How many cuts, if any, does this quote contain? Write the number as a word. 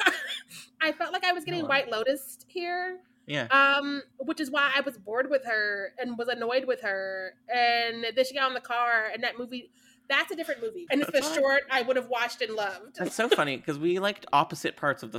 one